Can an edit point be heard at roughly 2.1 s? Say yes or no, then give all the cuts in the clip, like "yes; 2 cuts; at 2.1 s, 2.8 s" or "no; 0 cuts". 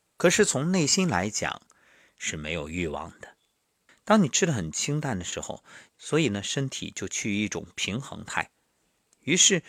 no; 2 cuts; at 3.9 s, 5.9 s